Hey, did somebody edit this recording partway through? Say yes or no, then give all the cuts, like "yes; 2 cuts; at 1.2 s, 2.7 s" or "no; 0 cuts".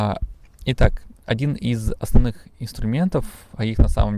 yes; 1 cut; at 1.2 s